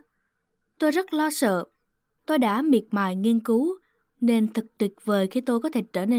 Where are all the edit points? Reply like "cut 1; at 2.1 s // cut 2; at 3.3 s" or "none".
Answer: cut 1; at 2.2 s // cut 2; at 4.1 s